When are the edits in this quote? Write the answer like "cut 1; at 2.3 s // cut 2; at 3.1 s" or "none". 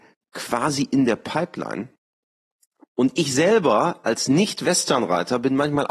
none

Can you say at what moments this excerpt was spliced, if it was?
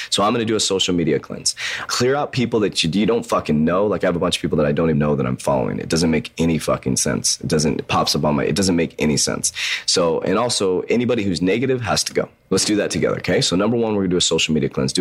cut 1; at 1.9 s // cut 2; at 4.9 s

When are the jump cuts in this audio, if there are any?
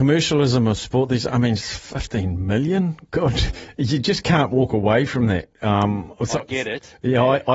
none

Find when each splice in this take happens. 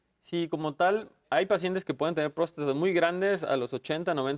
cut 1; at 1.2 s

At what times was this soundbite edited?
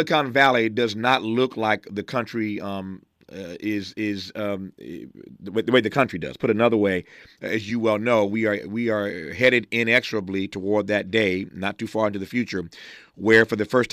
none

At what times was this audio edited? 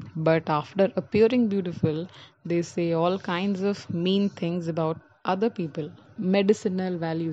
cut 1; at 6.2 s

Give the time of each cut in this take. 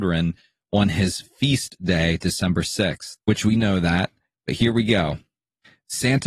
cut 1; at 3.2 s

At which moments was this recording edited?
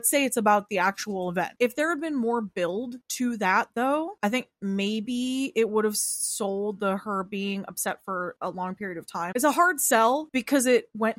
cut 1; at 1.6 s // cut 2; at 9.3 s

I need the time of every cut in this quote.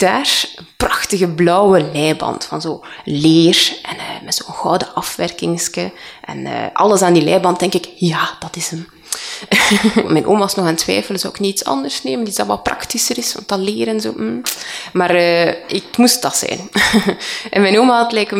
cut 1; at 10.0 s

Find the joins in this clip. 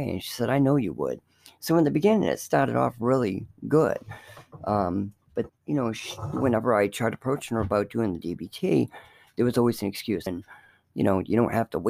cut 1; at 5.5 s // cut 2; at 10.3 s

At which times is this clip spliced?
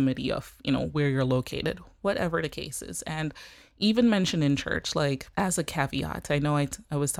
cut 1; at 5.3 s

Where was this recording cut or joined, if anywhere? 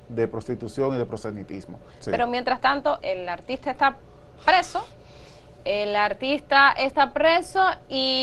cut 1; at 1.9 s // cut 2; at 3.0 s

